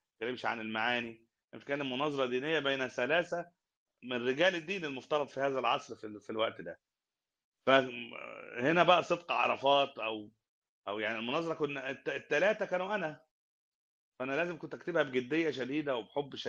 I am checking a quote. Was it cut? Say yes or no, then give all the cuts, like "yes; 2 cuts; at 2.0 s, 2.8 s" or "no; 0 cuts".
no; 0 cuts